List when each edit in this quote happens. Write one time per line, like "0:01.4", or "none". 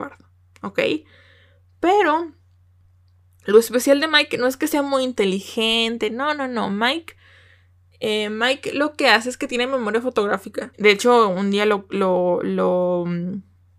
0:10.7